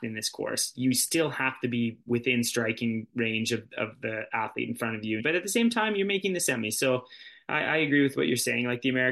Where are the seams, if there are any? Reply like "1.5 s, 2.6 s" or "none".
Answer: 5.2 s